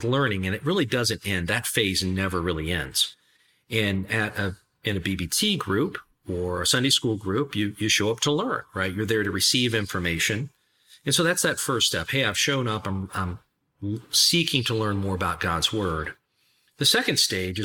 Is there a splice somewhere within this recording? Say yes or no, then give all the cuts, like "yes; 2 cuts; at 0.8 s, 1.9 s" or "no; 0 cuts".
yes; 1 cut; at 13.1 s